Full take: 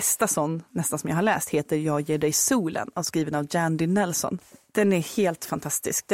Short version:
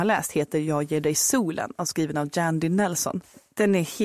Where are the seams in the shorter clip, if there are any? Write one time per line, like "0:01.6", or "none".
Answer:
none